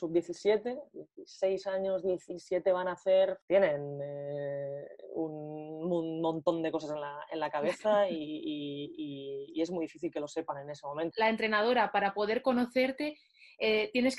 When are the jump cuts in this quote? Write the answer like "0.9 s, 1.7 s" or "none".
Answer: 3.4 s, 11.1 s